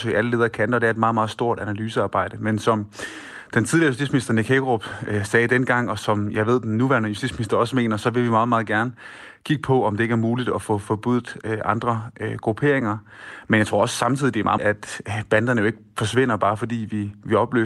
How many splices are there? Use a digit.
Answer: 1